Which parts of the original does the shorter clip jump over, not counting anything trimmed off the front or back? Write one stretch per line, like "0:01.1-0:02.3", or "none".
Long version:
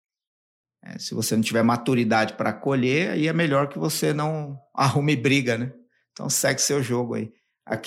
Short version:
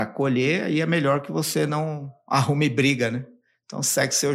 none